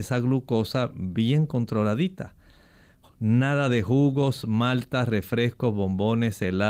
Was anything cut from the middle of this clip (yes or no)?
no